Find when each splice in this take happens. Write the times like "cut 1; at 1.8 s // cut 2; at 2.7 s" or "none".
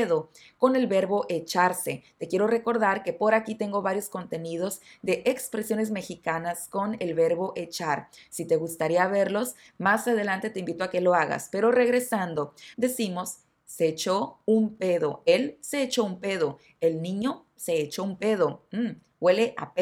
cut 1; at 12.7 s